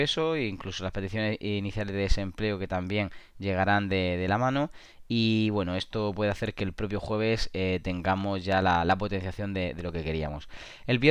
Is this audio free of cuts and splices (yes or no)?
yes